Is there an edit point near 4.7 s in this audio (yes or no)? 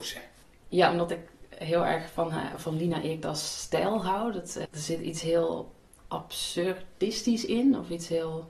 yes